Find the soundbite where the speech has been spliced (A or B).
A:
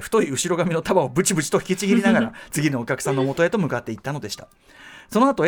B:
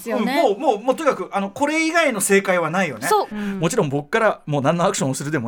B